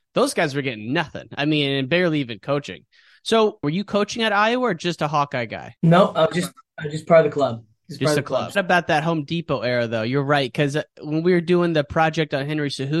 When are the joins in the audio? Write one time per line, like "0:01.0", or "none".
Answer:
0:03.6
0:05.8
0:08.5

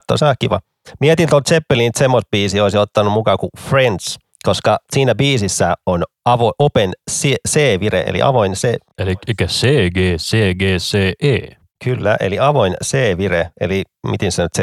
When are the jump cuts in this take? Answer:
none

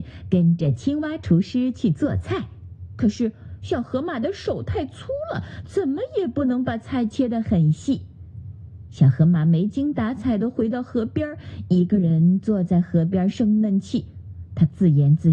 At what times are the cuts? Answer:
none

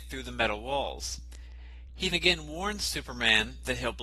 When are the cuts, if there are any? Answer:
0:02.1

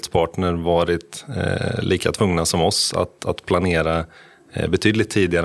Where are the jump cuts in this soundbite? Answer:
none

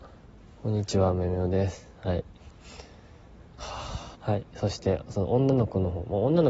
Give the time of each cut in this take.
0:04.2

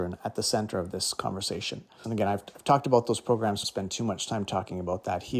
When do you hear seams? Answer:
0:02.0
0:03.6

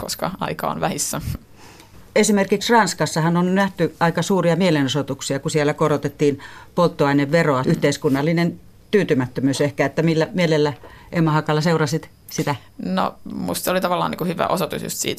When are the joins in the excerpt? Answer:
0:07.6

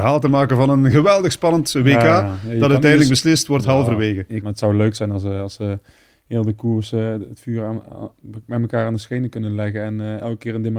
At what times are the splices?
0:04.4

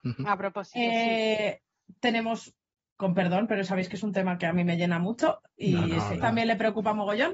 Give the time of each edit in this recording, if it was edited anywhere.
0:02.9
0:06.2

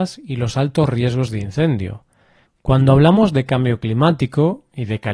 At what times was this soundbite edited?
0:02.4

